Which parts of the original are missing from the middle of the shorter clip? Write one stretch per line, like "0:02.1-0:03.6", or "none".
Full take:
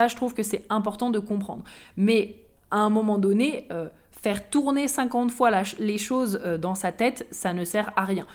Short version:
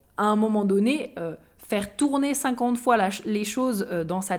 none